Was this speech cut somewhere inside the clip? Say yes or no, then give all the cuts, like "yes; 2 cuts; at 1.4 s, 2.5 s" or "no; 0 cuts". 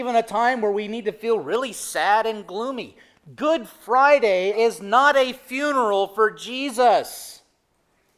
yes; 1 cut; at 4.5 s